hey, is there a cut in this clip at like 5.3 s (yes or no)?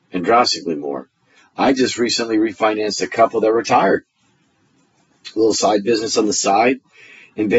no